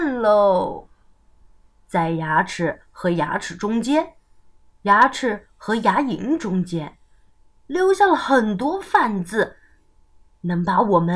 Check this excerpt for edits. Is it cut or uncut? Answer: uncut